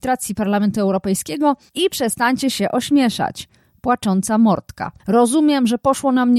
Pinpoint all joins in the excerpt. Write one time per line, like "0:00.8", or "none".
0:05.0